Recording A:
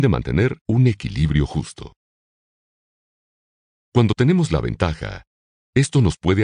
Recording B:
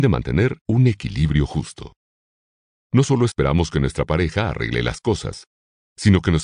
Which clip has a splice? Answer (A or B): B